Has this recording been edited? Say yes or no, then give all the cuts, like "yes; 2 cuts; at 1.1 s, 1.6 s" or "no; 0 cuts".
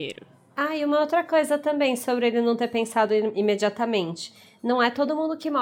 no; 0 cuts